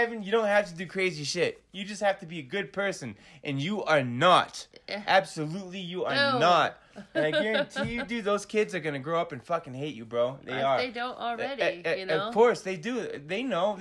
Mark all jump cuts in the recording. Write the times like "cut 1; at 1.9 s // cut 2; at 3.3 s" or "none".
none